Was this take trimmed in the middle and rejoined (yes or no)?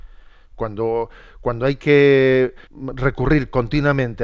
yes